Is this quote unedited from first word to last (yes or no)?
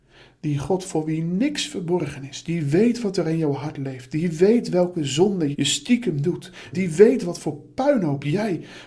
no